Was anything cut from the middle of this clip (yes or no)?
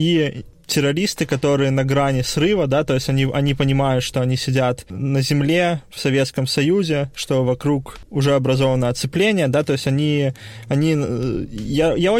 no